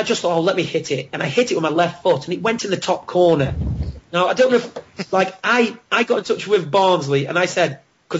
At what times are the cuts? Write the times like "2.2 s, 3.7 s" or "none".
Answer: none